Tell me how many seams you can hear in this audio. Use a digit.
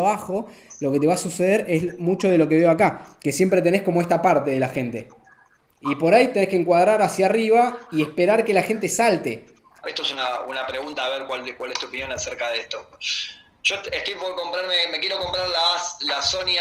1